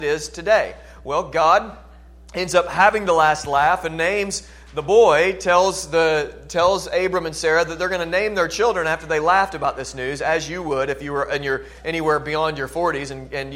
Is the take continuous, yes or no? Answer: yes